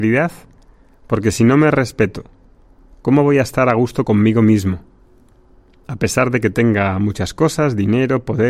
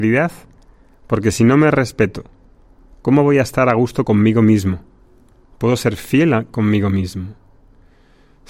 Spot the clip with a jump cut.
second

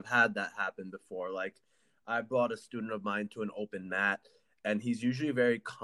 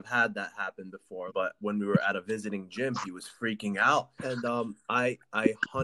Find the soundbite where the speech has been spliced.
second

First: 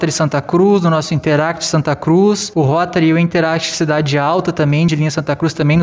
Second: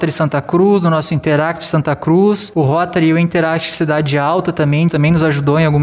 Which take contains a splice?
second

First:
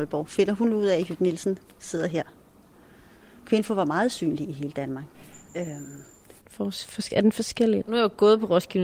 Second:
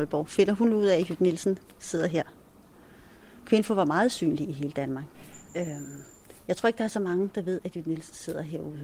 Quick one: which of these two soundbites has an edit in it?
first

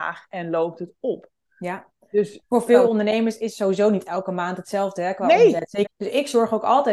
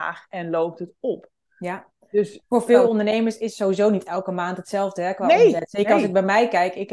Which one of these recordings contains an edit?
first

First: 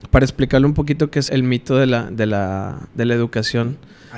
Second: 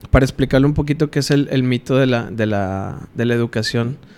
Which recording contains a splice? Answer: first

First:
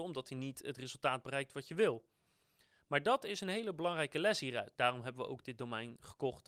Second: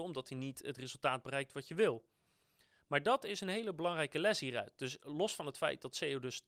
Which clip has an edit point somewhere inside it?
first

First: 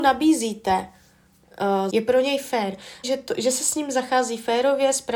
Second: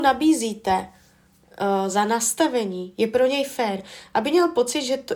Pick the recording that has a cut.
first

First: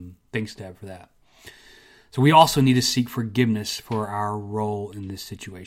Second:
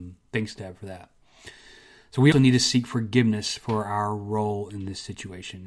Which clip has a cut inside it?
second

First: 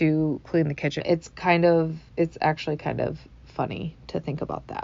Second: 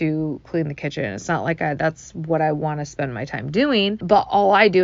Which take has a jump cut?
first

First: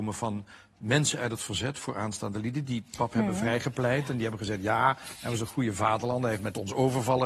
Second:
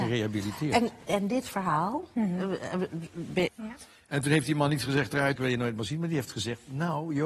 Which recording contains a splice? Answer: second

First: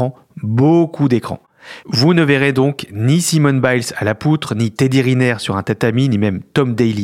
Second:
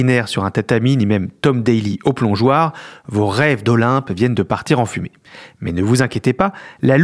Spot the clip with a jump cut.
first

